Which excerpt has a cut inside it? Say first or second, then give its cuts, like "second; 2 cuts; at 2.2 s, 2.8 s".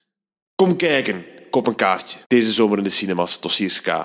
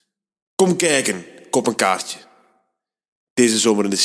first; 1 cut; at 2.2 s